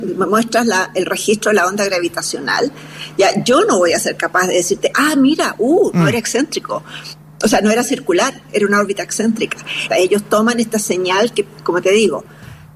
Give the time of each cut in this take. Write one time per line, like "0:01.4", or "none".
0:09.9